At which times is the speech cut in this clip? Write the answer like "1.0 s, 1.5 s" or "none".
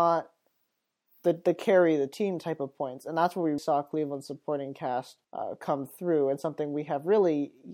3.6 s, 5.2 s